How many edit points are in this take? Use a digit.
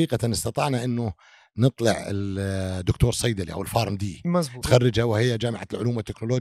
1